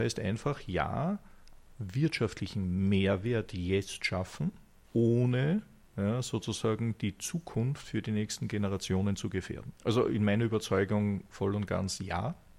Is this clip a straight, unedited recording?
no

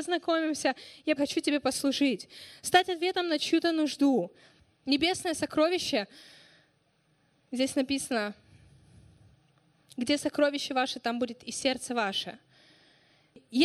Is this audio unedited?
no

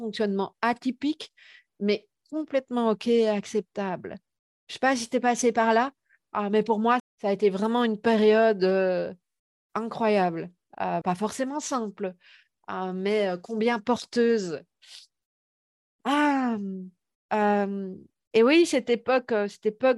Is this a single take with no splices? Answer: no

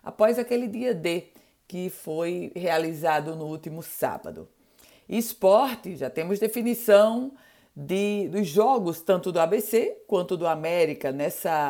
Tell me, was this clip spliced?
no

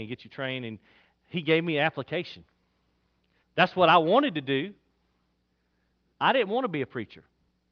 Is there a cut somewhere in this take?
yes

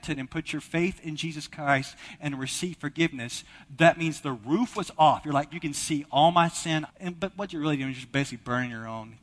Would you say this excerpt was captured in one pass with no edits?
no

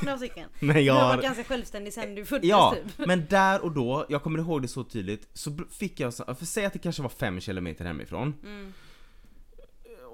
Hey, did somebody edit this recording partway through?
no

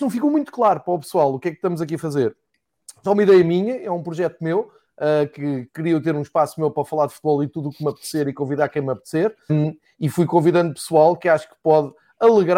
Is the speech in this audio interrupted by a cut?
yes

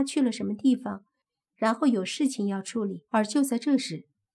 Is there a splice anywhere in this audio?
yes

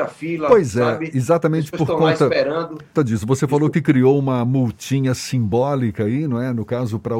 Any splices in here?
yes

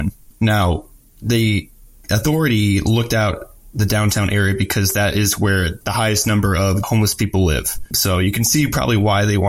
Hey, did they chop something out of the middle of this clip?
no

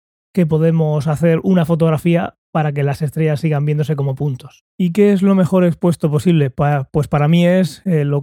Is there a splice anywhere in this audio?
yes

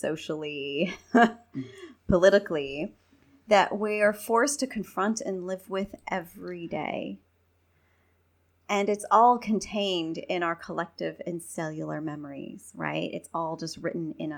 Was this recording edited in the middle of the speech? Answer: no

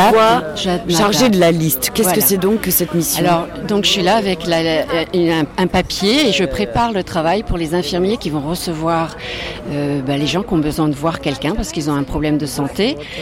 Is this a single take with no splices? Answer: yes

